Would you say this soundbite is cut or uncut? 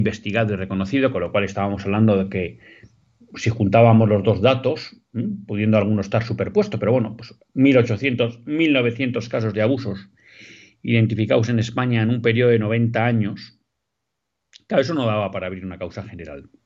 uncut